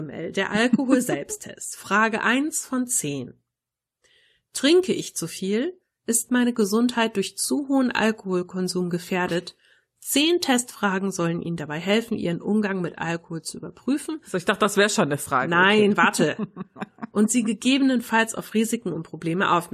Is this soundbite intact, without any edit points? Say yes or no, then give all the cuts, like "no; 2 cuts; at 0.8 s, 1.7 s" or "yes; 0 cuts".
yes; 0 cuts